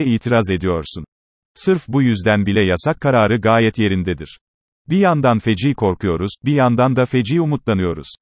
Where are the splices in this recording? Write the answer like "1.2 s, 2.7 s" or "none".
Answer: 1.5 s, 4.7 s

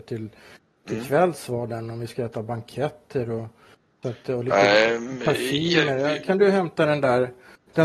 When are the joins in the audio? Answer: none

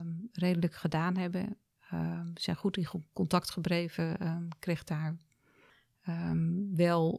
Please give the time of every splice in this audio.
none

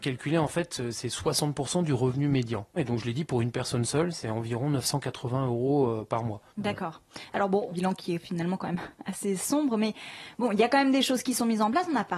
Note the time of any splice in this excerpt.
2.8 s, 6.5 s, 7.7 s

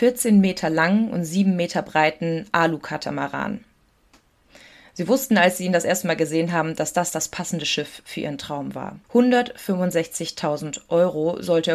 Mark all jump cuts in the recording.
9.0 s

